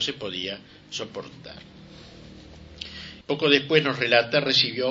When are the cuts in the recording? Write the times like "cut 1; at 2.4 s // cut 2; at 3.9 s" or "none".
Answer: cut 1; at 3.2 s